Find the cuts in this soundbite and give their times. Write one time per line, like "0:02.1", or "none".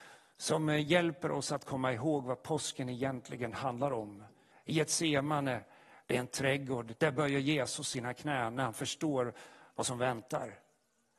0:04.5

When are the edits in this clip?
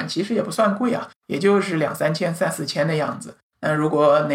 0:03.4

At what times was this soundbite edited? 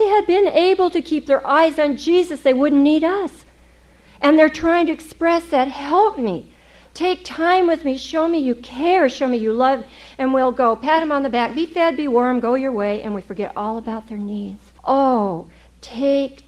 0:14.8

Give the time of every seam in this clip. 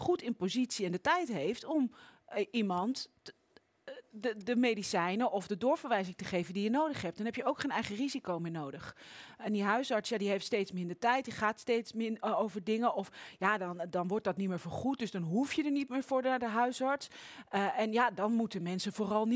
none

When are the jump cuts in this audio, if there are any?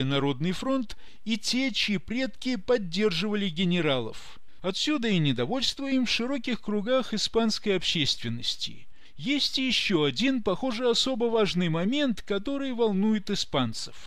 0:04.6

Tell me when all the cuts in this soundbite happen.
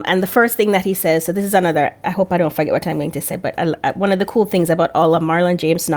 none

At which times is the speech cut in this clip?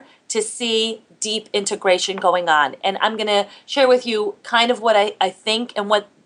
none

